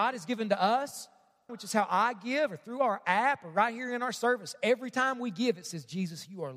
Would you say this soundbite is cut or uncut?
cut